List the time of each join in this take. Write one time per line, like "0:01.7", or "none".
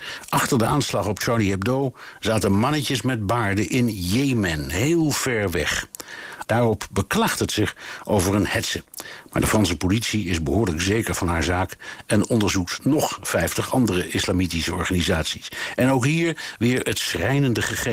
0:06.4